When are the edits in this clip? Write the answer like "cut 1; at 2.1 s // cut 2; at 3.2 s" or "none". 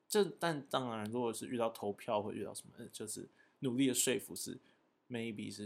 none